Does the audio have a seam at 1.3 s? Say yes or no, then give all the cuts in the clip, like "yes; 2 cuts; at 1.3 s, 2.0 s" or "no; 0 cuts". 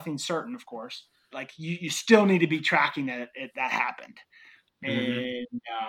yes; 2 cuts; at 1.3 s, 4.7 s